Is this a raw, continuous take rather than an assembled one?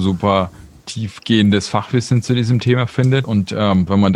no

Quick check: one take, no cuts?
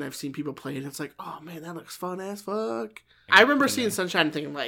no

